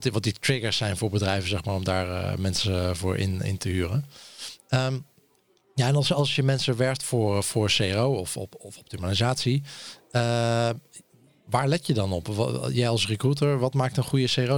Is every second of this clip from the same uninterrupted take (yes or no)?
yes